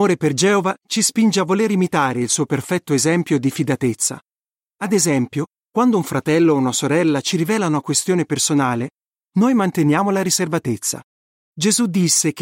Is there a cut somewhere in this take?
yes; 1 cut; at 11.5 s

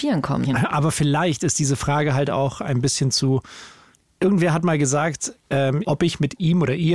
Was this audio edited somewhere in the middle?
yes; 1 cut; at 5.8 s

